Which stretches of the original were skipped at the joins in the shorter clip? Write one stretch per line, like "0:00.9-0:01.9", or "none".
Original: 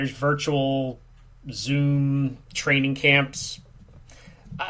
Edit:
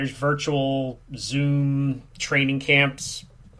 0:01.0-0:01.4